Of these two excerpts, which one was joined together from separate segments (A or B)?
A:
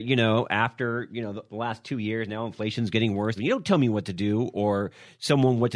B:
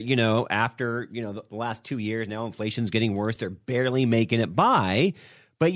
A